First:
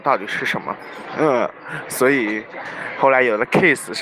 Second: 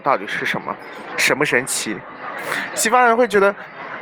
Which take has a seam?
second; 1 cut; at 1.1 s

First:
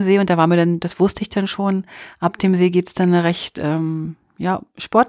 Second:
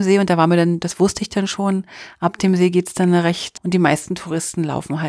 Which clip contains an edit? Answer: second; 1 cut; at 3.6 s

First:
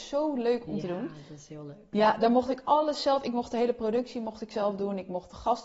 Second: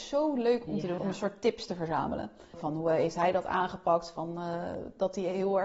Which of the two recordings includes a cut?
second; 2 cuts; at 1.0 s, 2.5 s

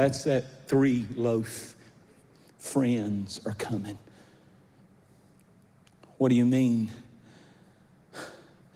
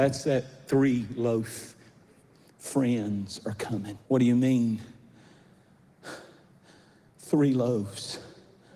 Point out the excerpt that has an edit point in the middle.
second; 1 cut; at 4.0 s

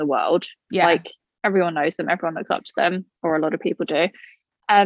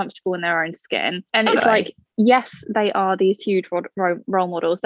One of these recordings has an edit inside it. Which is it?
second; 1 cut; at 1.3 s

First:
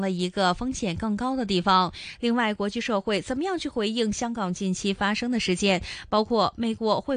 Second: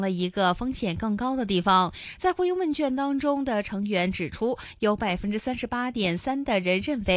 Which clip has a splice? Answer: first; 1 cut; at 2.2 s

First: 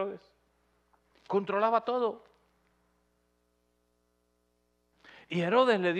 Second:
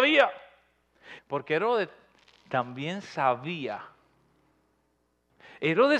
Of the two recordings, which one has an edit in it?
second; 1 cut; at 1.2 s

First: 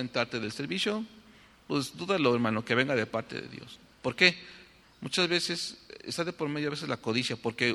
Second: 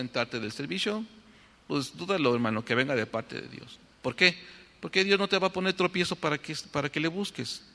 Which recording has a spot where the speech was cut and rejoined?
first; 1 cut; at 4.8 s

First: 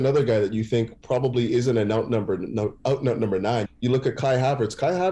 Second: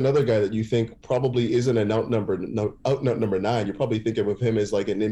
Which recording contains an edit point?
first; 1 cut; at 3.6 s

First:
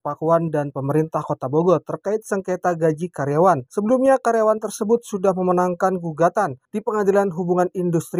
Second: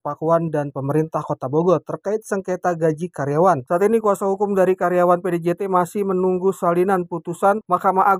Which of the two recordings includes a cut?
second; 1 cut; at 3.7 s

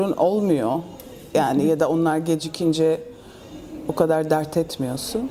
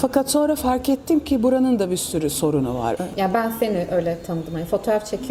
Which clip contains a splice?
second; 1 cut; at 3.0 s

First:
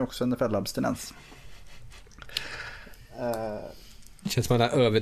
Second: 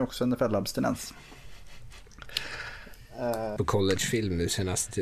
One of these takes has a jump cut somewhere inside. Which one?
second; 1 cut; at 3.6 s

